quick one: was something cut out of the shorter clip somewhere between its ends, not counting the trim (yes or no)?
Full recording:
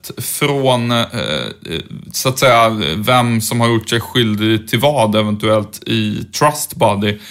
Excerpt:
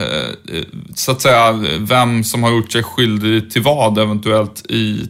no